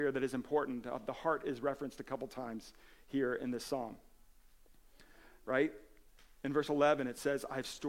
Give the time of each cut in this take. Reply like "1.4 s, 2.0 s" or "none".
none